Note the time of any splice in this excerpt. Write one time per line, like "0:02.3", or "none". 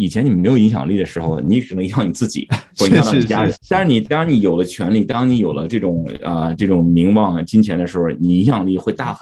0:03.5